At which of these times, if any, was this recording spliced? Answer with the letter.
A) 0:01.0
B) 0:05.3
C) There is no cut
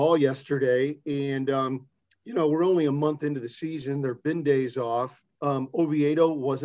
B